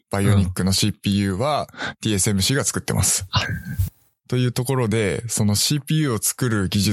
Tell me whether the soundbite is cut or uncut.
cut